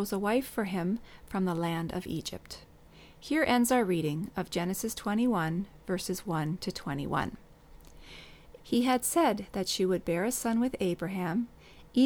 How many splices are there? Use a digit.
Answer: 1